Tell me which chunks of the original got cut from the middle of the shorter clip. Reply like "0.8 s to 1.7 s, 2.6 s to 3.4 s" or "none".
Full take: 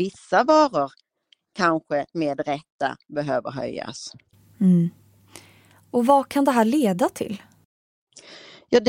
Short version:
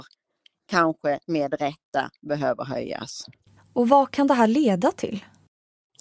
4.4 s to 5.7 s